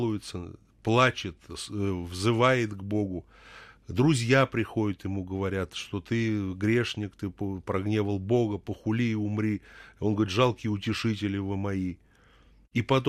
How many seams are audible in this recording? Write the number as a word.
zero